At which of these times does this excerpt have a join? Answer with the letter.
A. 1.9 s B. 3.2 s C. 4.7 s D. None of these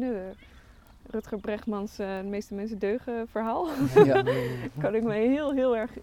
D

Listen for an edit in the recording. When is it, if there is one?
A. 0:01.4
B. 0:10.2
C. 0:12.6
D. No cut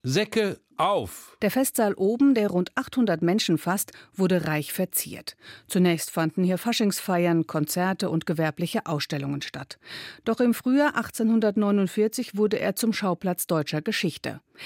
A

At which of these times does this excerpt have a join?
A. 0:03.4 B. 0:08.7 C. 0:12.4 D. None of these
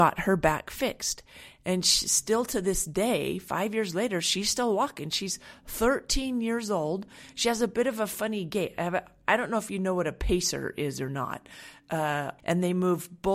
C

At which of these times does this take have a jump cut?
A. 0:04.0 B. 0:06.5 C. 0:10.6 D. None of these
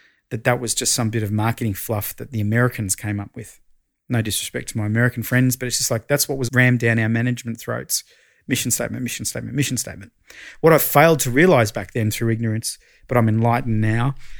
B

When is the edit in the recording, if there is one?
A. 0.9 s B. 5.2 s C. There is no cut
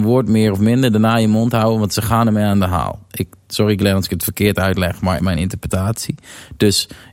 B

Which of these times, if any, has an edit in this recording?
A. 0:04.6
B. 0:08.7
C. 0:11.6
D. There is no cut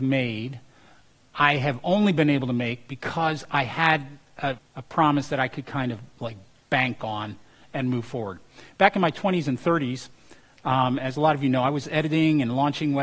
A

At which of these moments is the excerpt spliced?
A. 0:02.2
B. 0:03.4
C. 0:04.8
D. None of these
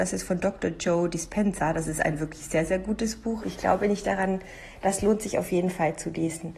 B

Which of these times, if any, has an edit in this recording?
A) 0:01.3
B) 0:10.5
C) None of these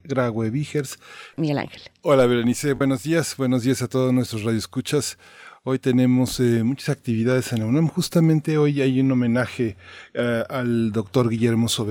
A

